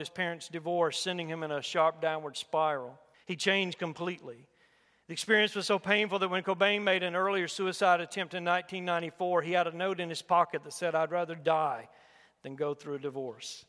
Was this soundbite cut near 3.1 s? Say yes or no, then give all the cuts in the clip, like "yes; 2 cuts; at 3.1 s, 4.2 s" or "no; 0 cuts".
yes; 1 cut; at 3.1 s